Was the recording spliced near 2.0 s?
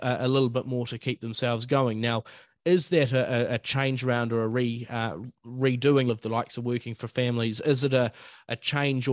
no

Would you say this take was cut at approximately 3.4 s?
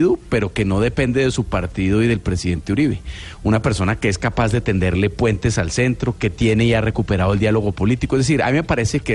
no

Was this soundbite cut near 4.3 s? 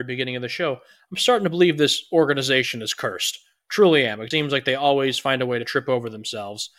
yes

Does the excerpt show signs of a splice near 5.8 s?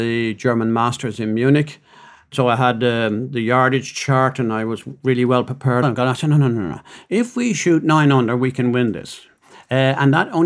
yes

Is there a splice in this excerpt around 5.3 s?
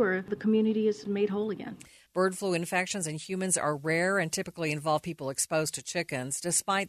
no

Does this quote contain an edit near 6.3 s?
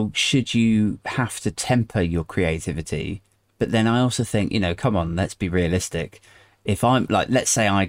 no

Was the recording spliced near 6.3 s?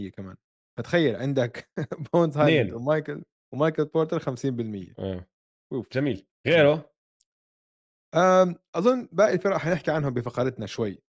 yes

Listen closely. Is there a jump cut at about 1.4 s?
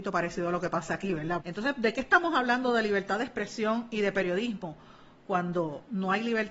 yes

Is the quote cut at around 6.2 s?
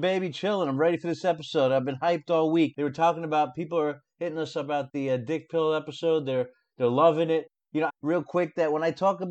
no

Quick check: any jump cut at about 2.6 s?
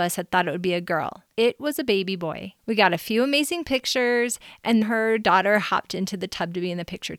yes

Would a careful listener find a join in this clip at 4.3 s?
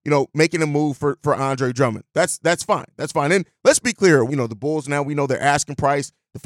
yes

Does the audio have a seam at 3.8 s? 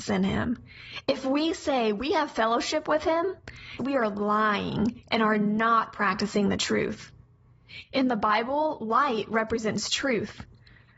yes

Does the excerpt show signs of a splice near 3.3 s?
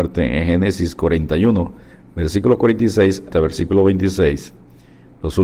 yes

